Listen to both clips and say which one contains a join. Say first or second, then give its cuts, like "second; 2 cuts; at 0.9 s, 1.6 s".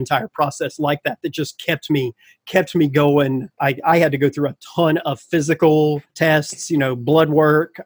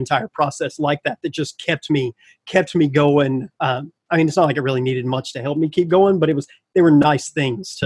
first; 2 cuts; at 3.6 s, 6.1 s